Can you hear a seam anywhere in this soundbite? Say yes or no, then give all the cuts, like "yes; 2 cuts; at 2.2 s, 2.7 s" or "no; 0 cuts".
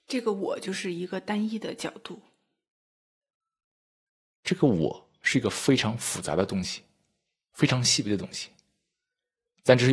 no; 0 cuts